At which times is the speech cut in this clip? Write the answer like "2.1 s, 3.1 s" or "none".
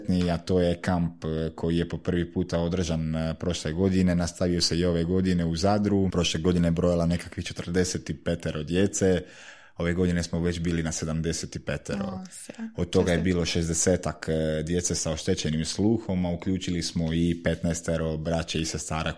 6.1 s